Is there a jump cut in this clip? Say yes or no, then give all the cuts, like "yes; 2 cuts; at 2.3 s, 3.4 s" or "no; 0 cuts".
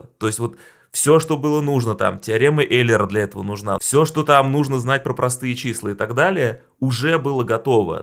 yes; 1 cut; at 3.8 s